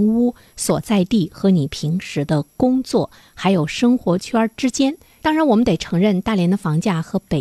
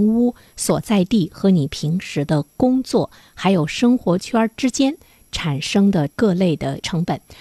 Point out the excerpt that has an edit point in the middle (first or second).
first